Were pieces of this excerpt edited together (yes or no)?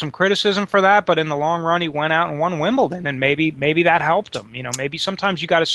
no